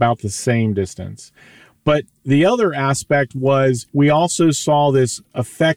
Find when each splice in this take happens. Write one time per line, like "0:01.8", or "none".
0:03.9